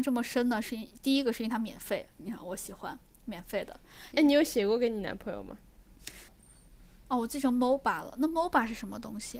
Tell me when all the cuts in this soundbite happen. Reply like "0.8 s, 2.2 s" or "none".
4.1 s, 6.3 s